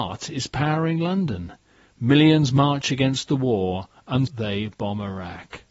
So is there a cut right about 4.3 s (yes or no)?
yes